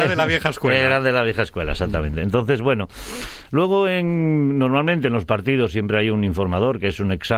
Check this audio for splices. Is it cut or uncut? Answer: uncut